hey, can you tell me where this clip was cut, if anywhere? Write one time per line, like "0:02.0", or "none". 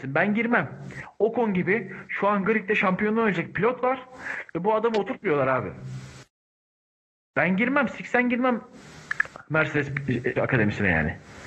0:10.4